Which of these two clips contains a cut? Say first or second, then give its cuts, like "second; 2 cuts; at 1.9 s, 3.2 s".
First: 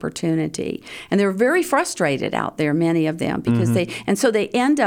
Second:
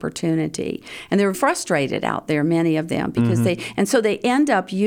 second; 1 cut; at 1.3 s